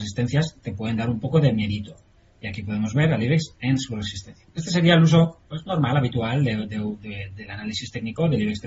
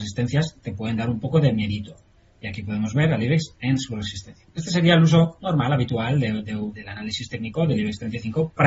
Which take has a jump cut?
second; 2 cuts; at 5.4 s, 6.7 s

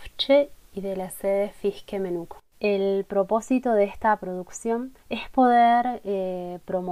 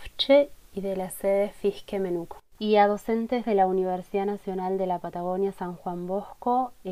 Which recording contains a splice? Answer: first; 2 cuts; at 2.5 s, 5.0 s

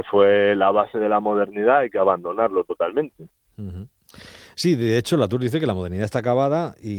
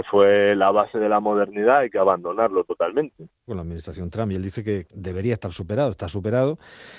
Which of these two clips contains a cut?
second; 2 cuts; at 3.5 s, 4.9 s

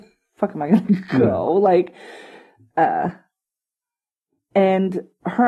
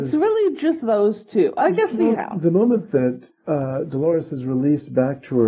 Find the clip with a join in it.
second; 2 cuts; at 2.2 s, 3.4 s

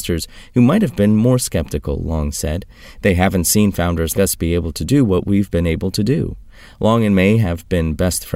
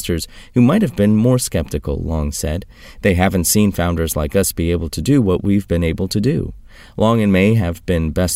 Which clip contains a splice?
first; 1 cut; at 4.1 s

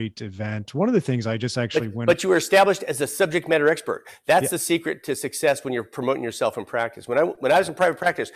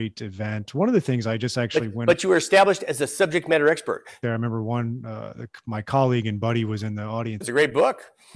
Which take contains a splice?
second; 2 cuts; at 4.2 s, 7.4 s

